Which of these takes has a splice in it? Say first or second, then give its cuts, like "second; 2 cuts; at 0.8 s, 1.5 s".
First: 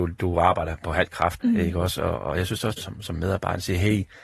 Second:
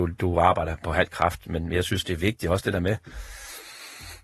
first; 2 cuts; at 1.4 s, 2.8 s